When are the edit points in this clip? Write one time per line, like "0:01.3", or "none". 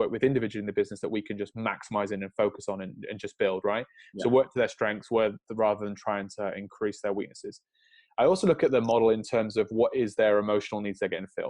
none

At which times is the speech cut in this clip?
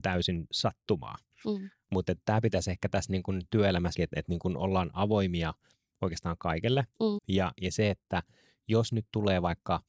0:04.0
0:07.2

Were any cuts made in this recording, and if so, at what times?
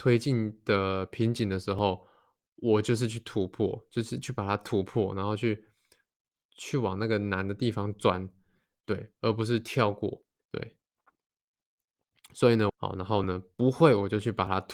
0:10.4
0:12.7

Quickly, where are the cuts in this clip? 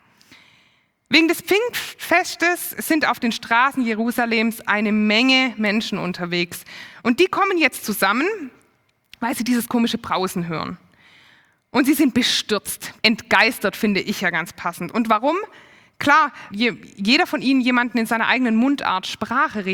0:13.0
0:16.5

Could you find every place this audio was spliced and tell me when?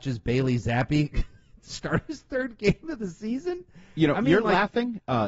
none

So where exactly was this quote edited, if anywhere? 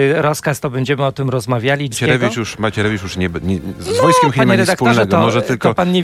0:01.9

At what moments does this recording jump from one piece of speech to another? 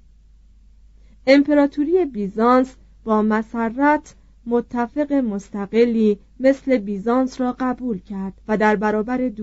0:08.4

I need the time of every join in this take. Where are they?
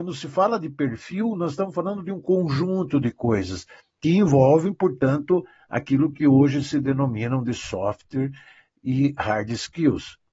none

